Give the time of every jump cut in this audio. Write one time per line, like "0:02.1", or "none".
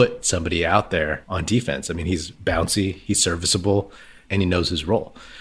none